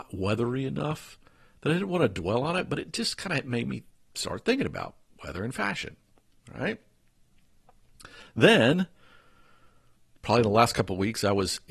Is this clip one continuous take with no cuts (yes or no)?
yes